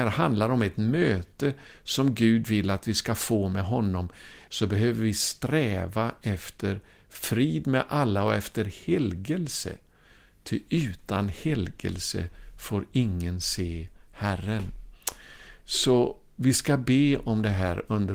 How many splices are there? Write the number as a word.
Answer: one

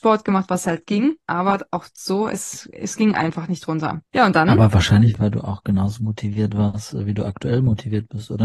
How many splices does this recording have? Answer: zero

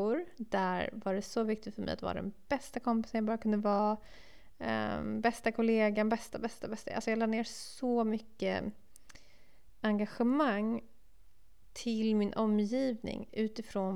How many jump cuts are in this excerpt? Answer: one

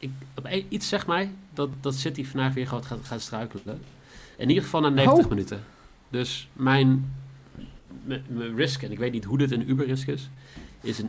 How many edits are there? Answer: zero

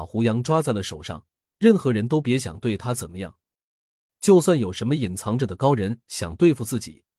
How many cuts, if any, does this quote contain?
one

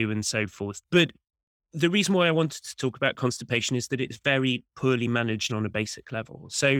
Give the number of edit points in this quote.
one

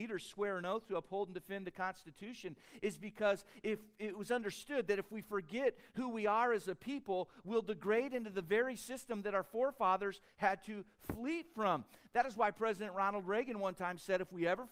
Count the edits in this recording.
zero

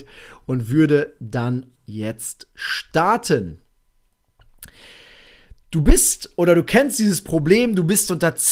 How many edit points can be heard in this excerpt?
one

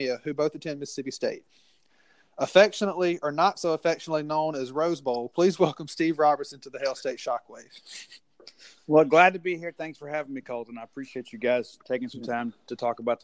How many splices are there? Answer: zero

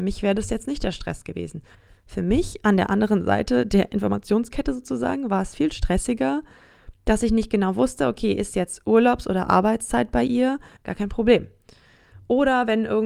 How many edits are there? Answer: one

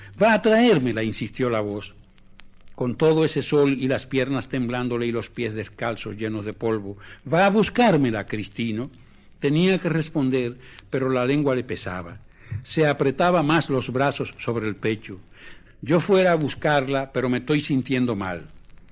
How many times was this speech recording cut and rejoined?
one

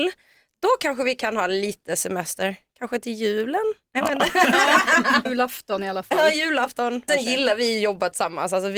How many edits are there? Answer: two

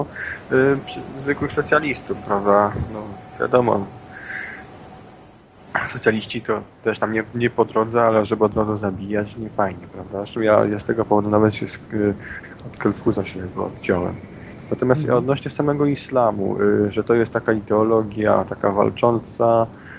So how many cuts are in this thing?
zero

